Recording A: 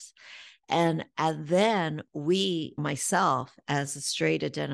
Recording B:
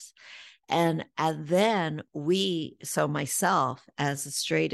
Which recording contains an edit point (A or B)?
A